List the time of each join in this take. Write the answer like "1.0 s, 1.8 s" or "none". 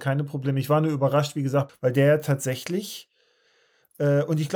1.7 s